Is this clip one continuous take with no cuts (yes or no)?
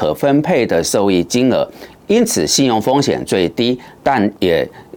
no